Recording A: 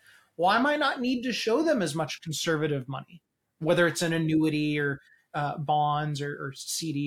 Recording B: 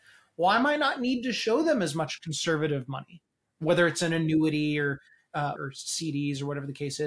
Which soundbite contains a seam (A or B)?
B